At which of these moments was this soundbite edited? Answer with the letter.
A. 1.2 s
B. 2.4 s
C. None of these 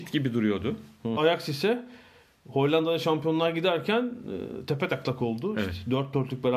A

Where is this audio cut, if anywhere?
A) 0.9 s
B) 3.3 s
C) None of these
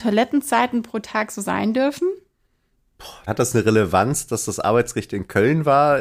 B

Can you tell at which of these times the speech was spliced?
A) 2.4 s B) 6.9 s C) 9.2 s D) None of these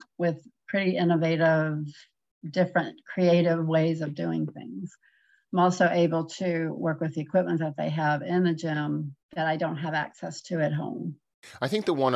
C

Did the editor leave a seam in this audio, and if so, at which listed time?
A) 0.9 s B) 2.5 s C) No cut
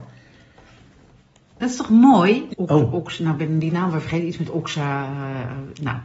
B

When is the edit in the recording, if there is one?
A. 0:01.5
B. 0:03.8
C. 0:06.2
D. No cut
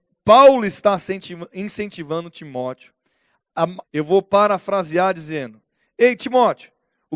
B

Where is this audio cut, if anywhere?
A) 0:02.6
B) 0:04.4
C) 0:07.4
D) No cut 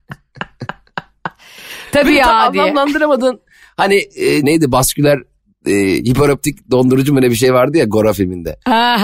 B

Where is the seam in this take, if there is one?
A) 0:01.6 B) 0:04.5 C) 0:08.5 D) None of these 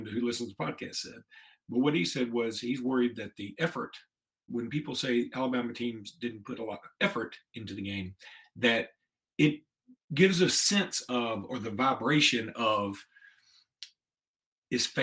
B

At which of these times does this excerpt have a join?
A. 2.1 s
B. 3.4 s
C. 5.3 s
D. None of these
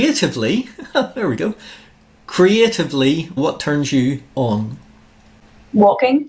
B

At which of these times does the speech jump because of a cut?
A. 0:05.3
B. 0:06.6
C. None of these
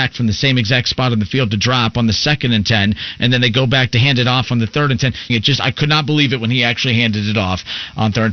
A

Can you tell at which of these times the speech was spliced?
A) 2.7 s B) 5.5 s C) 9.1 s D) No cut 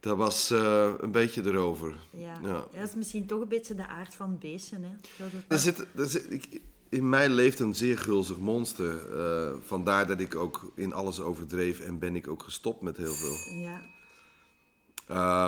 B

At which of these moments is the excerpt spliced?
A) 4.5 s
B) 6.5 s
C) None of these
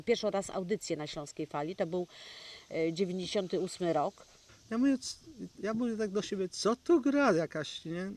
A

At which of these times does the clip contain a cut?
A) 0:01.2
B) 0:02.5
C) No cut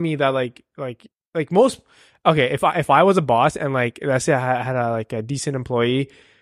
A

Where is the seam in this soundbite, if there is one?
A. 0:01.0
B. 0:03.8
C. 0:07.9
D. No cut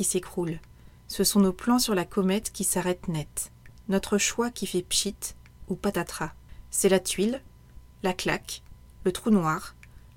D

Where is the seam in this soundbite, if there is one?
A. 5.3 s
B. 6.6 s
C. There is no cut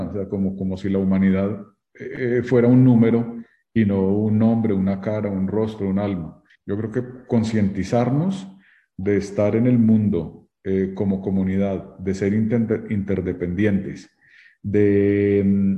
B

